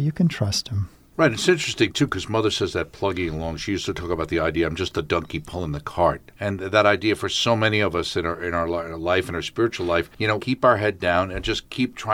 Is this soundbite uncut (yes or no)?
no